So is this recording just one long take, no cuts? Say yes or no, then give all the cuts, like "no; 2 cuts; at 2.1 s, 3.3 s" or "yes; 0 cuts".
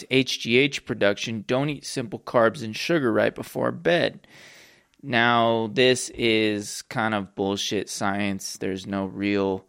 yes; 0 cuts